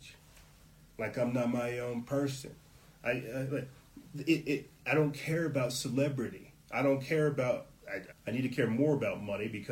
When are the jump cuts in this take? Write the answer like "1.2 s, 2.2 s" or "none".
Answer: 6.6 s, 8.1 s